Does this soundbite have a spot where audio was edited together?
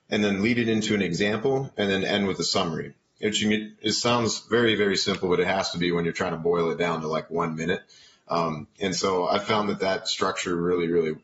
no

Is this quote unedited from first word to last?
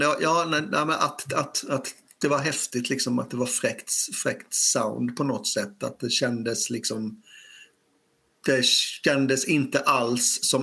yes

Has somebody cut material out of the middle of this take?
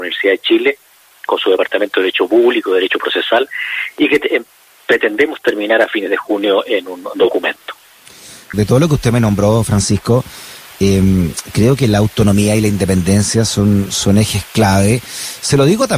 yes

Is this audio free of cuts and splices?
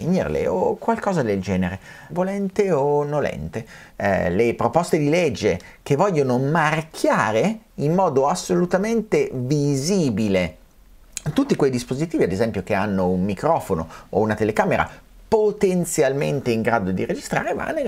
no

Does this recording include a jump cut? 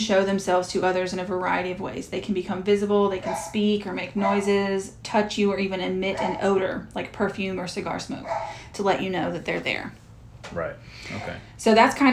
no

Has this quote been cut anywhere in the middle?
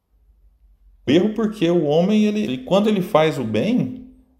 yes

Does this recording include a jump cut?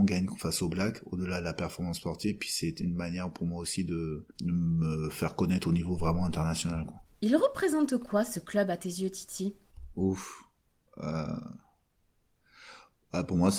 yes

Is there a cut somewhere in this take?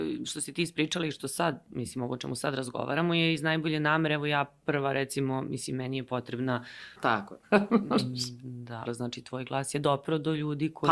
yes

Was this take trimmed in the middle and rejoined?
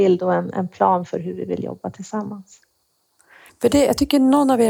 yes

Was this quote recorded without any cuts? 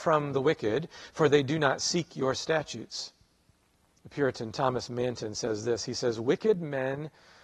no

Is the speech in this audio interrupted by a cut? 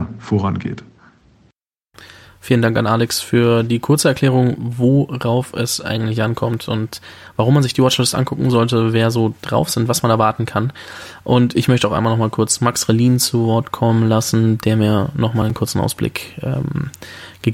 no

